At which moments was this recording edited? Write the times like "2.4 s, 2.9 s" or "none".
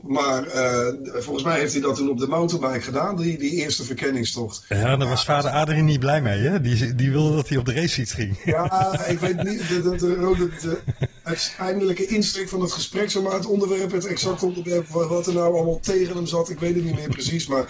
9.8 s